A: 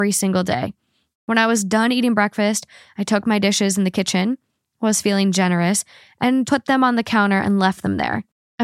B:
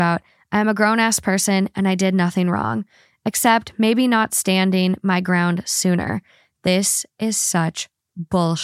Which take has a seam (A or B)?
A